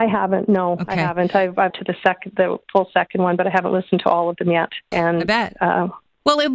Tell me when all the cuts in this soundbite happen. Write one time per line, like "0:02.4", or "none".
0:01.7
0:04.9